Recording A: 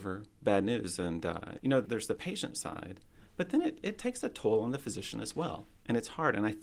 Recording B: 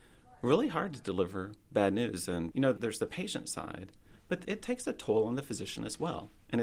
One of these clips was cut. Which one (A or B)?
B